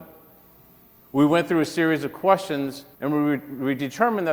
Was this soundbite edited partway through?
yes; 2 cuts; at 0.9 s, 2.9 s

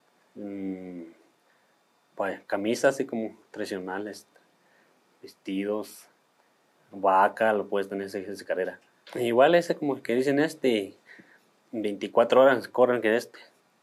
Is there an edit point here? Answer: yes; 1 cut; at 9.0 s

